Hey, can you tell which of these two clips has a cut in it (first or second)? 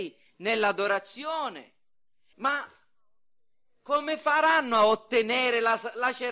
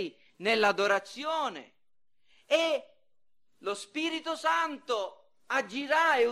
first